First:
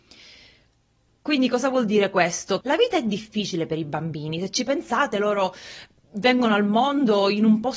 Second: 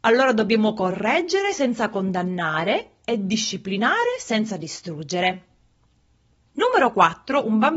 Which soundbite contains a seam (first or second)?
first